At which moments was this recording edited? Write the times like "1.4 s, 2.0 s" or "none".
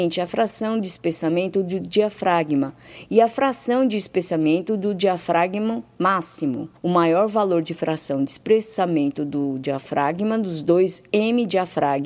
6.8 s